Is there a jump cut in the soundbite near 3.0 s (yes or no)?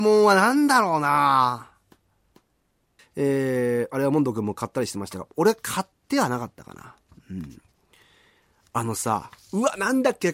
yes